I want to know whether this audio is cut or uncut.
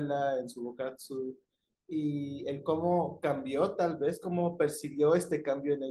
uncut